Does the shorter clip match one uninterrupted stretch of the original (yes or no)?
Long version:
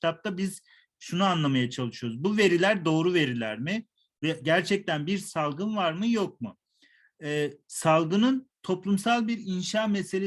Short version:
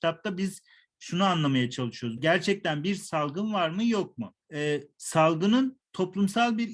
no